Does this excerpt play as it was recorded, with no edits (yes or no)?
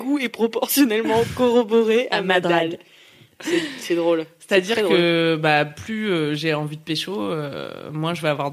yes